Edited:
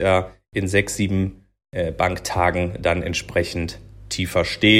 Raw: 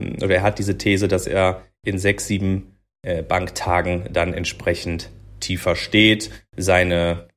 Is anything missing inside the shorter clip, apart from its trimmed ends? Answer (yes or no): no